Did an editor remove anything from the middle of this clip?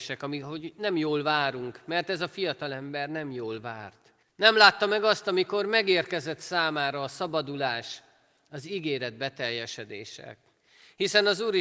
yes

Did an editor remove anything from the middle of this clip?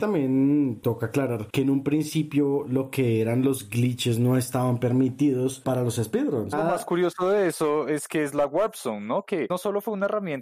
yes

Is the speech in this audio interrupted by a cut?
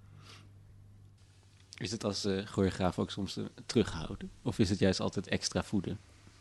no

